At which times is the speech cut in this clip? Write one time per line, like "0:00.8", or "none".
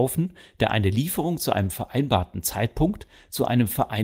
none